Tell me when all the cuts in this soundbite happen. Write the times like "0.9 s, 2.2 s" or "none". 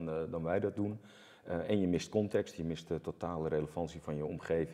none